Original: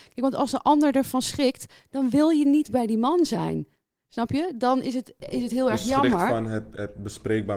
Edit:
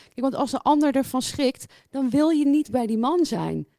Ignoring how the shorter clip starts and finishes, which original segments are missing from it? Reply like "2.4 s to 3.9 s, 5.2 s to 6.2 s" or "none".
none